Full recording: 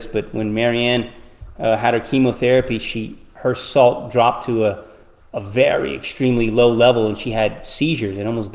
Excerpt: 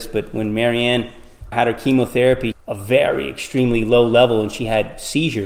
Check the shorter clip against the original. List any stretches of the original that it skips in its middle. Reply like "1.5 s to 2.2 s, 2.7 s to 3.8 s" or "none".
1.5 s to 1.8 s, 2.8 s to 5.2 s